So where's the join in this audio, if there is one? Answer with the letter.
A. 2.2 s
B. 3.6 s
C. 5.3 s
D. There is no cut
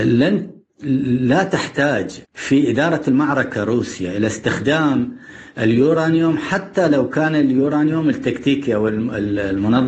A